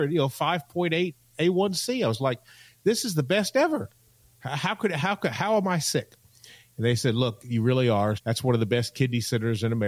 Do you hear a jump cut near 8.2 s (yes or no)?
yes